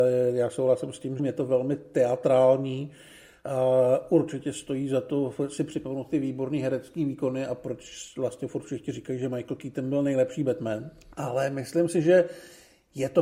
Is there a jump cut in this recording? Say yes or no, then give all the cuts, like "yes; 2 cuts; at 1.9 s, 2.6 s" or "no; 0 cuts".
yes; 2 cuts; at 1.2 s, 11.1 s